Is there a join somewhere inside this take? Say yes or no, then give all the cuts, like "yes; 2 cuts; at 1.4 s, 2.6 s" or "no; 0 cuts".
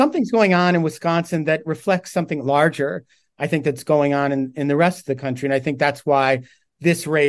no; 0 cuts